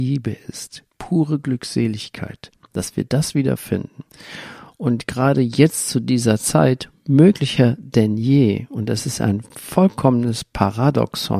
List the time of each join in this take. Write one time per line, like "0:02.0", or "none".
0:04.7
0:09.5